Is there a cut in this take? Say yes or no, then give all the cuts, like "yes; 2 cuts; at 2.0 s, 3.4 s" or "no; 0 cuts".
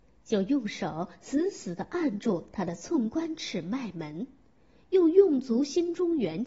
no; 0 cuts